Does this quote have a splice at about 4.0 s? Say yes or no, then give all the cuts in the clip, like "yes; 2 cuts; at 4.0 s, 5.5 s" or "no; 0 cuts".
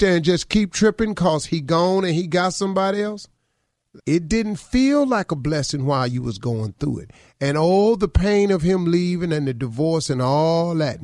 yes; 1 cut; at 4.0 s